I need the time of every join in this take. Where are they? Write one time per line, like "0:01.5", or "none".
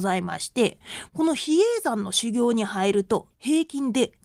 0:03.3